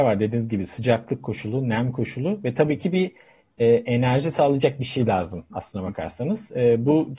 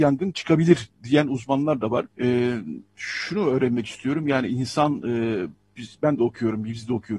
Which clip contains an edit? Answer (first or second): second